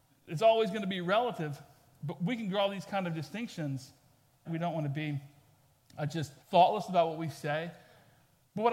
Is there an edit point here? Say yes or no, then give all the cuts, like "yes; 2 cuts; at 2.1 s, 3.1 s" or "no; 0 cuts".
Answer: yes; 2 cuts; at 4.5 s, 6.4 s